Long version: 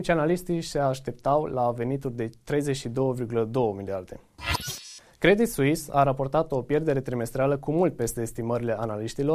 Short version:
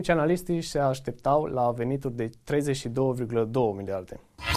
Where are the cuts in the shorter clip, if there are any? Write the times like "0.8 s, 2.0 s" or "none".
none